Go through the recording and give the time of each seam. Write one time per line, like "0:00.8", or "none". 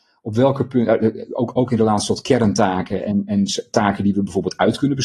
none